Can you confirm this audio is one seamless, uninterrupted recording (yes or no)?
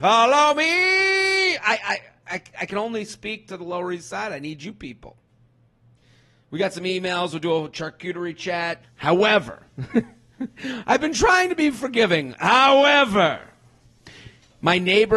no